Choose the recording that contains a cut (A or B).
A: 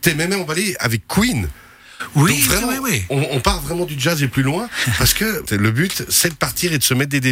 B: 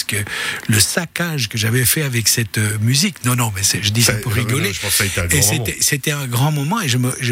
A